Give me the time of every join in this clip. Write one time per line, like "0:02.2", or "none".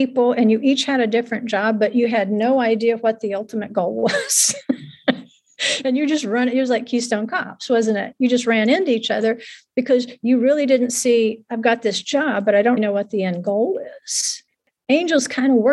0:12.8

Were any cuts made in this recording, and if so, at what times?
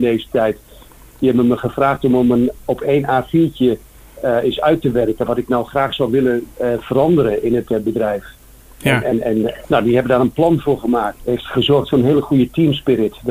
0:09.6
0:11.2

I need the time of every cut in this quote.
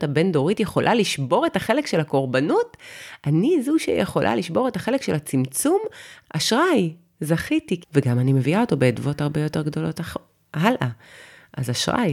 0:06.2
0:07.8

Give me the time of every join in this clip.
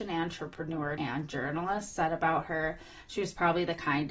0:01.0

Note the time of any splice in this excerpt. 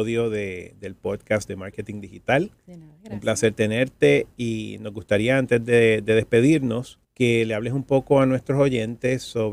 0:07.0

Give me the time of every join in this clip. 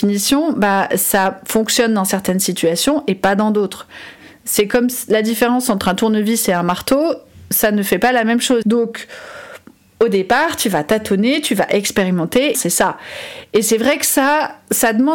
0:08.6
0:12.5

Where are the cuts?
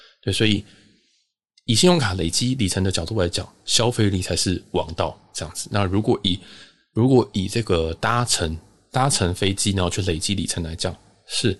none

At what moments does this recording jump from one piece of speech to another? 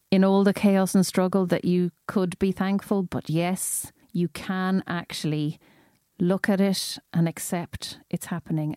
0:04.0

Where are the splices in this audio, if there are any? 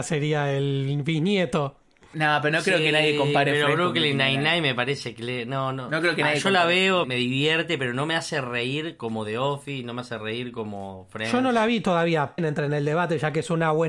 0:07.0
0:12.4

